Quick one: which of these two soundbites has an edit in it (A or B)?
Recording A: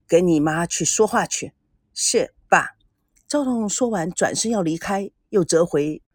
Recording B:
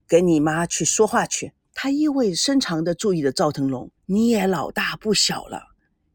B